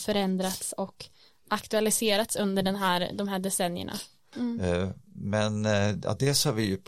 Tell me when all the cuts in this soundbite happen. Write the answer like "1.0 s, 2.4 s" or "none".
4.3 s